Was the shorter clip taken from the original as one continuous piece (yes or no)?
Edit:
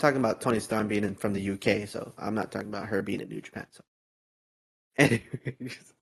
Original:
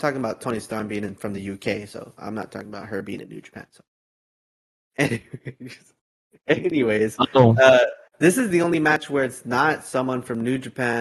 yes